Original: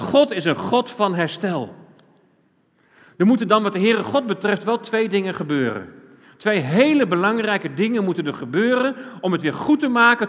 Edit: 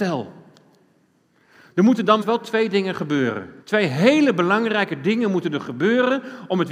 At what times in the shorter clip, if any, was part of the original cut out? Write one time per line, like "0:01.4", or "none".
0:02.2
0:03.6